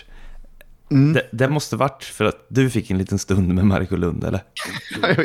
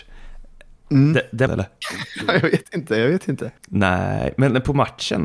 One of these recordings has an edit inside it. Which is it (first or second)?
second